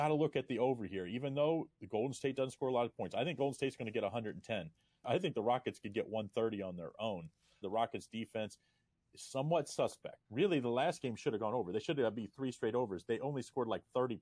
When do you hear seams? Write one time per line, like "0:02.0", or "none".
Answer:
0:05.0
0:07.6
0:10.2